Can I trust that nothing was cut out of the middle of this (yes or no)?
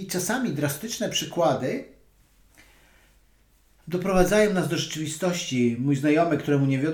yes